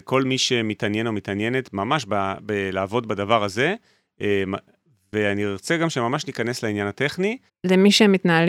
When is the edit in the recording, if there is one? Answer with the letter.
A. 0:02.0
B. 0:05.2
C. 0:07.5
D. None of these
C